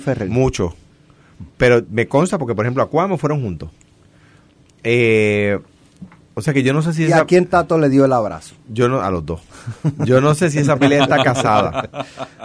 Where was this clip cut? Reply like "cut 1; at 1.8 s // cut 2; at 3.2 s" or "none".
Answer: none